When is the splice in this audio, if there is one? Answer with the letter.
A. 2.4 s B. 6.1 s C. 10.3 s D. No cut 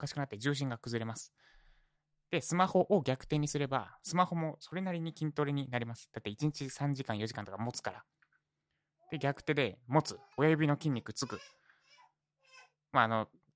C